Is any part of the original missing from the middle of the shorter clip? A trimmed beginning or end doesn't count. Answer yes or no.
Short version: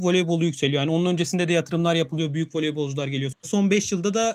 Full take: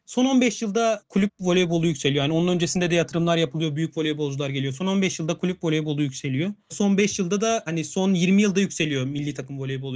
yes